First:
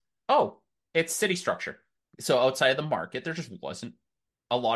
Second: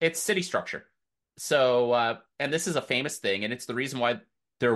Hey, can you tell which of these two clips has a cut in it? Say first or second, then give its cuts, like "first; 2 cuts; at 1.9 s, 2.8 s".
first; 1 cut; at 2.0 s